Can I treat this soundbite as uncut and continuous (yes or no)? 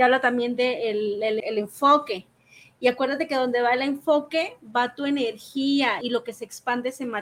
no